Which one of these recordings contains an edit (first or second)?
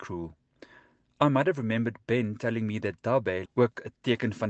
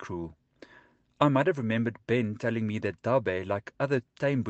first